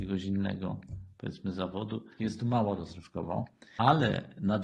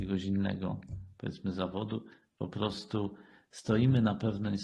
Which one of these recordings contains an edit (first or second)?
first